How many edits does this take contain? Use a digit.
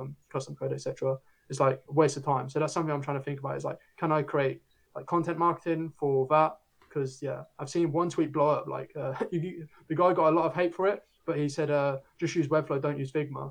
0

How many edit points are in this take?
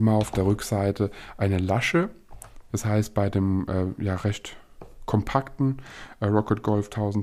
1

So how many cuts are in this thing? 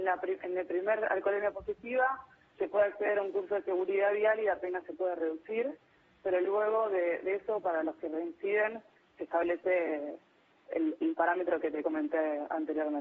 0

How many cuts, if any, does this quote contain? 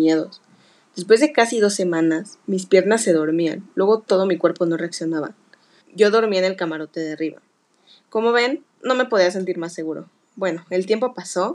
2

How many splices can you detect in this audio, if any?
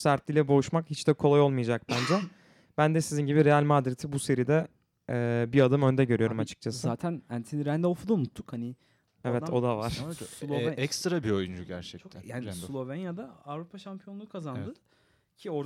0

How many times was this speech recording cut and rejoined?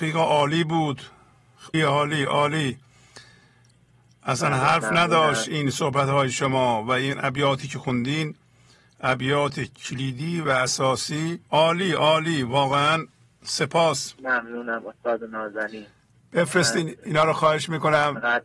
2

